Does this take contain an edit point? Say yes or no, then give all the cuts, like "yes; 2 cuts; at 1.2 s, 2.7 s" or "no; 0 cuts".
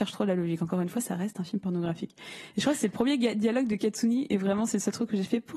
no; 0 cuts